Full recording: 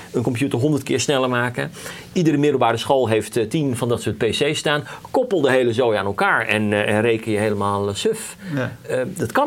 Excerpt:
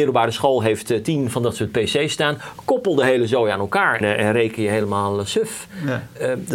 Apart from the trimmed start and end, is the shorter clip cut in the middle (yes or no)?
yes